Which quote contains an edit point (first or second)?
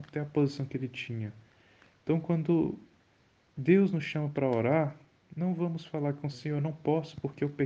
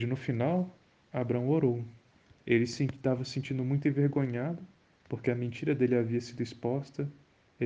first